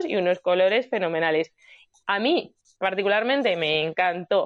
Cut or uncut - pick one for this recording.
uncut